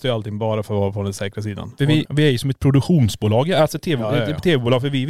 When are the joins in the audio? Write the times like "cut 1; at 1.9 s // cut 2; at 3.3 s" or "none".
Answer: cut 1; at 2.1 s

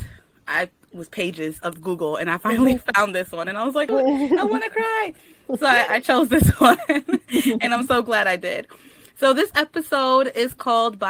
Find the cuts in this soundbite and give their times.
cut 1; at 3.9 s

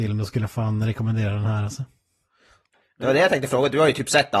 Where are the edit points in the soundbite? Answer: none

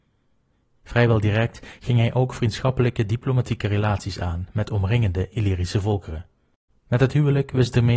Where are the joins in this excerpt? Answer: cut 1; at 6.7 s

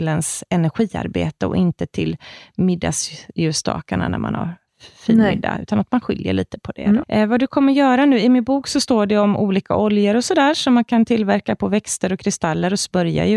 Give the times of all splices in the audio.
cut 1; at 7.0 s

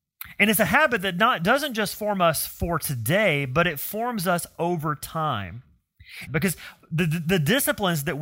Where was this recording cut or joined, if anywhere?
cut 1; at 6.3 s

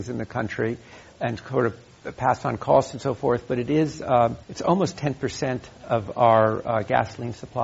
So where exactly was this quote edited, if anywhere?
cut 1; at 4.4 s

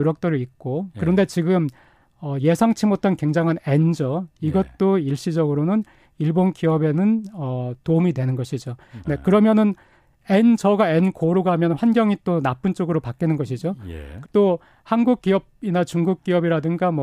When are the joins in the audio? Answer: cut 1; at 9.0 s // cut 2; at 14.2 s

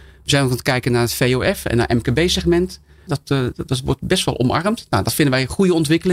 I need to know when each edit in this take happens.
cut 1; at 3.1 s

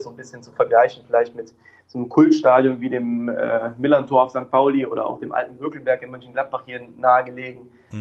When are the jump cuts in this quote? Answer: none

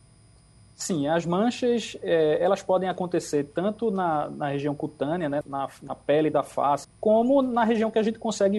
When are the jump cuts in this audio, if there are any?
cut 1; at 5.4 s // cut 2; at 6.8 s

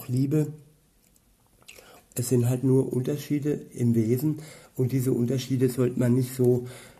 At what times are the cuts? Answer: cut 1; at 2.0 s

